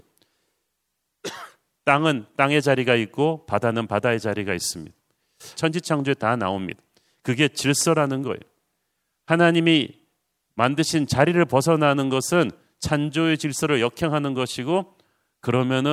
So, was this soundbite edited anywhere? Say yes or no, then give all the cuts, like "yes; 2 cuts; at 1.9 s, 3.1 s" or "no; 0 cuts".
yes; 1 cut; at 5.5 s